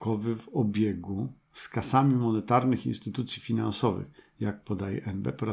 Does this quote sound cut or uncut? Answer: uncut